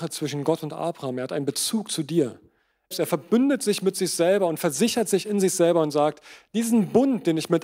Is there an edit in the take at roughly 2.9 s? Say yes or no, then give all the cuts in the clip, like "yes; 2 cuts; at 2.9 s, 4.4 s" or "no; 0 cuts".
yes; 1 cut; at 2.9 s